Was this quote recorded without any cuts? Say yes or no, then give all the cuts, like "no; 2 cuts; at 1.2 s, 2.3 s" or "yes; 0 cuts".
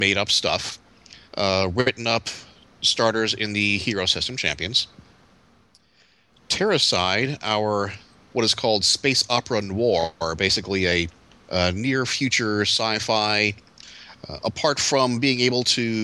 yes; 0 cuts